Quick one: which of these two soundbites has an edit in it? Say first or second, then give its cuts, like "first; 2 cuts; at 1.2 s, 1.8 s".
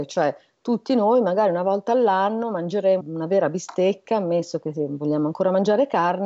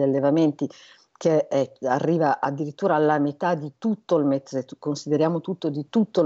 first; 1 cut; at 3.0 s